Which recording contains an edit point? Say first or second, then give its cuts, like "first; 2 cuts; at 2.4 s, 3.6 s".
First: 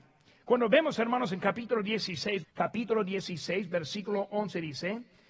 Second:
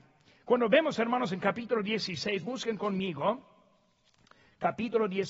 first; 1 cut; at 2.4 s